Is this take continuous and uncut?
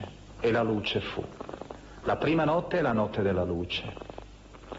yes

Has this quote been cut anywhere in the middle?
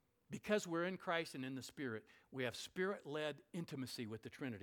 no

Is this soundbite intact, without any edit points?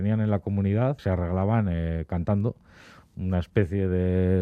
no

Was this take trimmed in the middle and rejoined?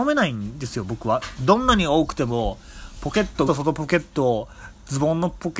yes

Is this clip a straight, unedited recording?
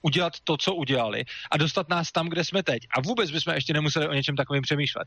yes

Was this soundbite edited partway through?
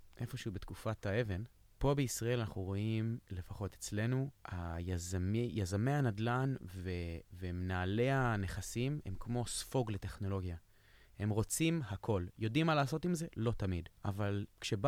no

